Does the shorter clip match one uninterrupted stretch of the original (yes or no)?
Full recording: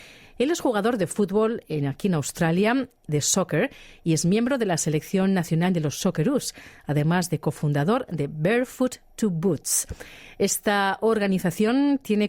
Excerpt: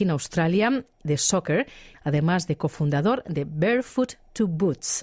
no